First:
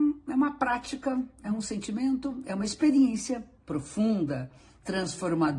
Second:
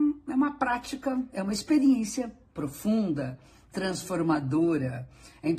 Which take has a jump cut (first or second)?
second